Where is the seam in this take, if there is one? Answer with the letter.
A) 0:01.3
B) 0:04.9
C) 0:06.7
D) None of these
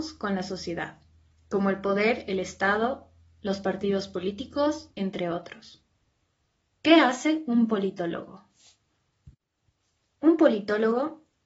B